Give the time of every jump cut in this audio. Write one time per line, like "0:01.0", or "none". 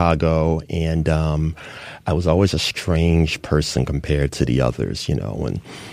none